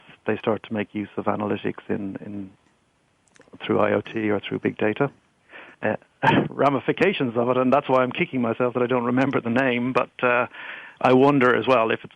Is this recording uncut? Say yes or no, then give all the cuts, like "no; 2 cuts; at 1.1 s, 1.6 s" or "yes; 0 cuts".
no; 2 cuts; at 5.7 s, 11.0 s